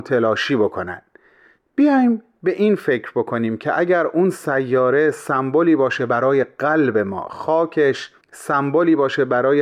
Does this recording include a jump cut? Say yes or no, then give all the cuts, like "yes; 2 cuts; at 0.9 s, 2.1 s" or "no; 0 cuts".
yes; 1 cut; at 8.2 s